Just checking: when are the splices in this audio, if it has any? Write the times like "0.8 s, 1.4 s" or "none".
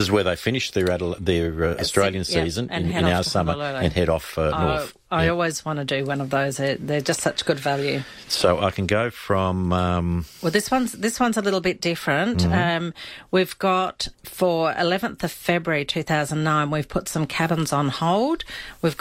14.1 s